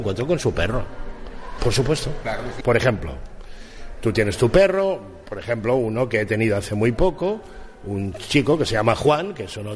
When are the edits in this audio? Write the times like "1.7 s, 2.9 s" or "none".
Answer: 1.6 s, 2.6 s